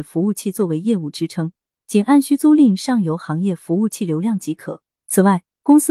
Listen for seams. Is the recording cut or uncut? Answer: uncut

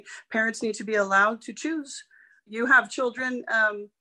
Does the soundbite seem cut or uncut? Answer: cut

